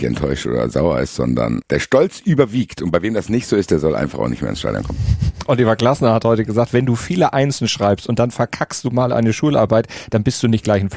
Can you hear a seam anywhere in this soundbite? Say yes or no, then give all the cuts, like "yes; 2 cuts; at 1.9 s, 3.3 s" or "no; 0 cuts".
yes; 1 cut; at 1.6 s